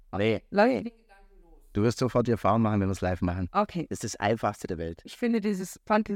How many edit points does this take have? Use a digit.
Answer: 1